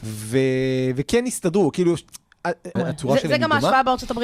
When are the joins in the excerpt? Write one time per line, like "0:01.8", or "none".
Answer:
0:02.8

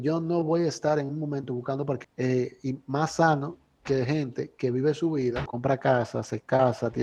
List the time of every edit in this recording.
0:02.0
0:05.5

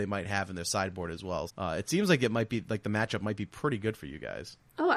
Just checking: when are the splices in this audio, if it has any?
0:01.5

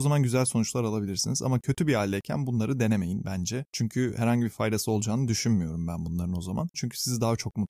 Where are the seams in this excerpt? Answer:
0:06.7

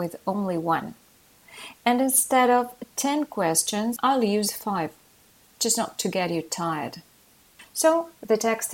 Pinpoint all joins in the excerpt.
0:04.0

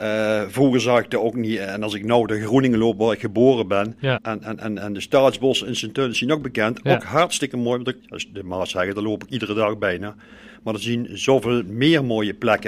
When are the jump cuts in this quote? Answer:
0:04.2
0:08.0

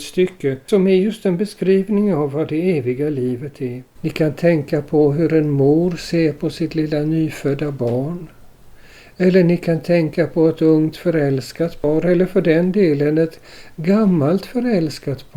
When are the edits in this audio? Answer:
0:04.0

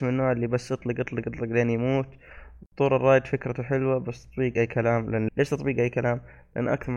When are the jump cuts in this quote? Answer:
0:01.2
0:05.3

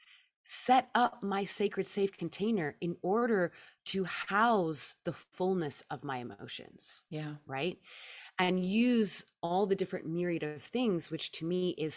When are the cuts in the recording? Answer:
none

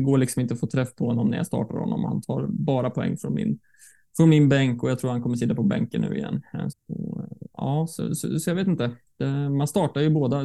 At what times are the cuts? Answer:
0:06.7

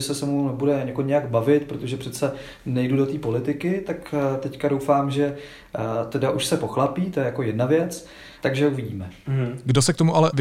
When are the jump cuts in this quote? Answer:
0:08.4

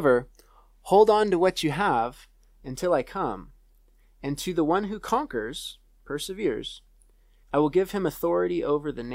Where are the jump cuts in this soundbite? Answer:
0:07.4

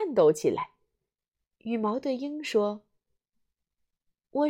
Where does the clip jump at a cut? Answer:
0:01.5

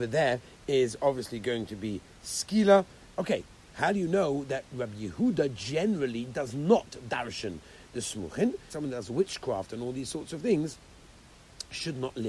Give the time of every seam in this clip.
0:03.1
0:08.7

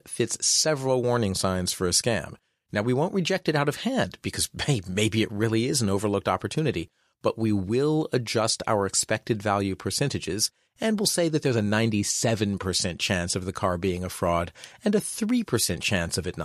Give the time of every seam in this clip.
none

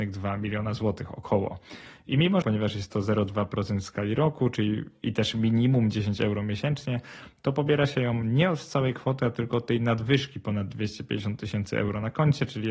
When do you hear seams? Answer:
0:02.4

